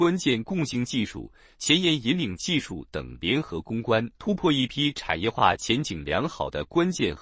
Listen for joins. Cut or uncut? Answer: cut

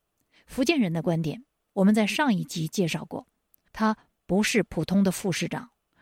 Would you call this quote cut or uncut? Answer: cut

